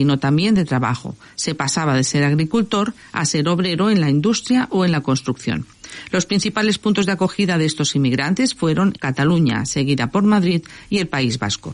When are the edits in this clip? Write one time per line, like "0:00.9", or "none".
0:09.0